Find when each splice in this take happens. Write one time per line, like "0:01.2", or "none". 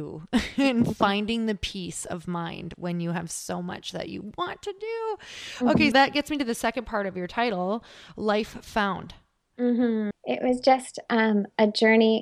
0:05.9
0:10.1